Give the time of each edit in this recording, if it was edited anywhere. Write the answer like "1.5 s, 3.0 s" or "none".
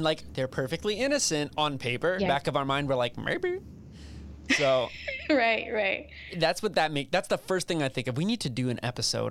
2.3 s